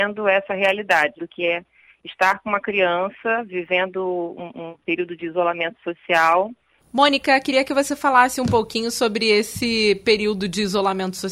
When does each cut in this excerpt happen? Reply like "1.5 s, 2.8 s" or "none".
1.2 s, 6.8 s